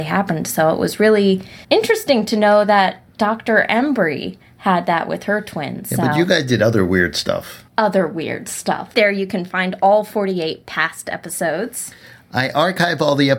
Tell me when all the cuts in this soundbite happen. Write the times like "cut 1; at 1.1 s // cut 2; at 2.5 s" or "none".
cut 1; at 1.6 s // cut 2; at 7.7 s // cut 3; at 8.9 s